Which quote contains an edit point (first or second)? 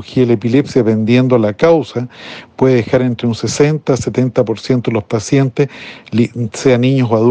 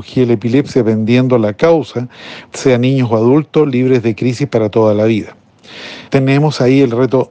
second